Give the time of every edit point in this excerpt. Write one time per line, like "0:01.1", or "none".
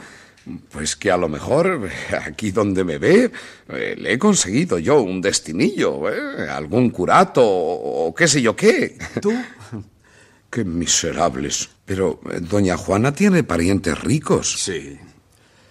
0:10.4
0:11.8